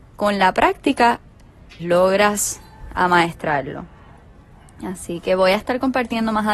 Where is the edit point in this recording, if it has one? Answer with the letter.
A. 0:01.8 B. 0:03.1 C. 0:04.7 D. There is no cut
A